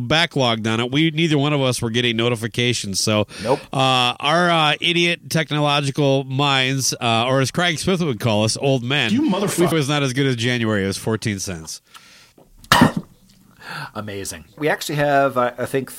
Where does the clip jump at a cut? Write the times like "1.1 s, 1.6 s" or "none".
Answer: 9.7 s, 14.6 s